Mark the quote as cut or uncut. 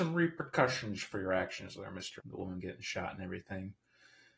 cut